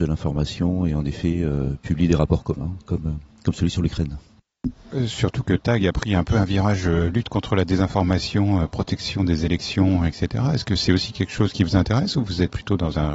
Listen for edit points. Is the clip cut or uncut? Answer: uncut